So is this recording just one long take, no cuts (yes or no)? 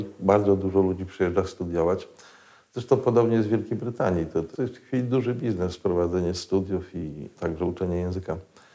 no